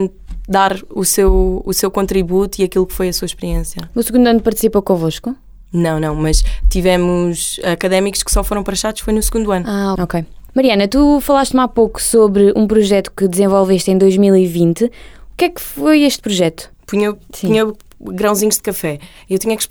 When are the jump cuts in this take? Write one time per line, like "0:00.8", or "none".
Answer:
0:10.0
0:16.7